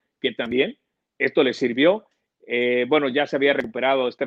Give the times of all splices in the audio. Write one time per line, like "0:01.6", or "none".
none